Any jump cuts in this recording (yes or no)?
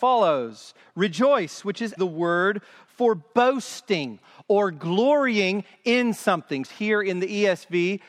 yes